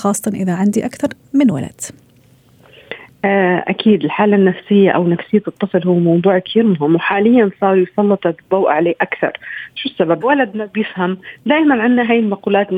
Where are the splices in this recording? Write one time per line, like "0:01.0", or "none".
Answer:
0:10.2